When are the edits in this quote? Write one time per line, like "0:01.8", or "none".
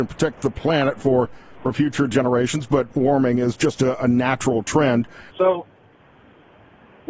0:02.9
0:05.3